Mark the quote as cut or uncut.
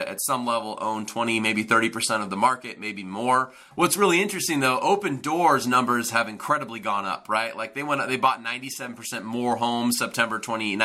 cut